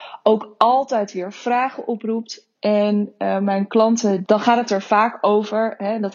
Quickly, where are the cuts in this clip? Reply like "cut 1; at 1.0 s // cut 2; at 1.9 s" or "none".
cut 1; at 2.5 s // cut 2; at 4.2 s